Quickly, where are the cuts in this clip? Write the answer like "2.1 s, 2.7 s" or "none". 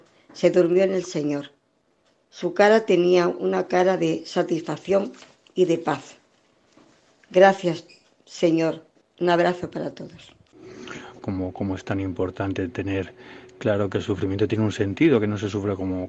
9.0 s, 11.2 s

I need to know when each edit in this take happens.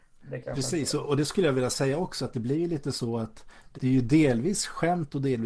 3.7 s

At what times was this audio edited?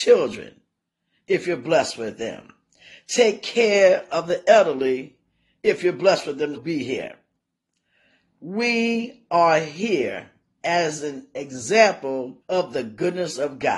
6.5 s, 12.4 s

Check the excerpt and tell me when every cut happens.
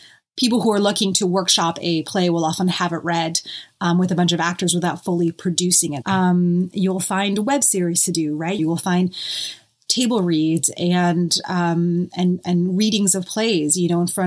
6.0 s, 8.6 s

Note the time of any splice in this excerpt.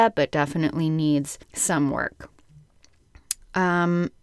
1.4 s

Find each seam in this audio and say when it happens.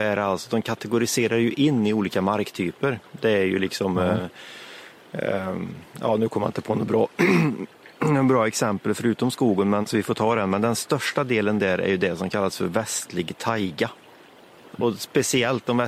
9.8 s, 14.7 s

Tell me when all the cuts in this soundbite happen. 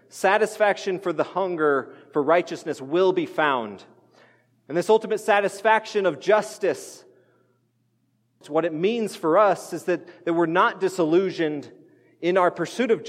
8.4 s

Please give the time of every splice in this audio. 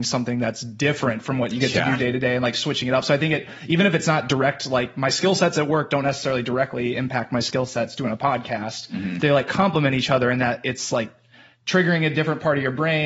none

